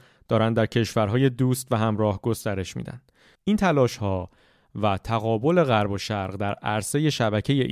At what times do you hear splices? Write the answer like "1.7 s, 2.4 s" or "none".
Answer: 3.4 s